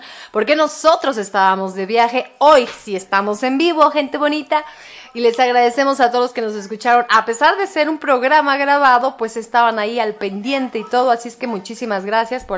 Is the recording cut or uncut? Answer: uncut